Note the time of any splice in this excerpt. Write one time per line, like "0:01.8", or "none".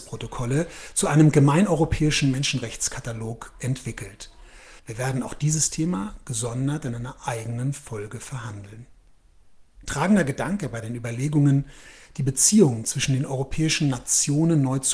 0:04.8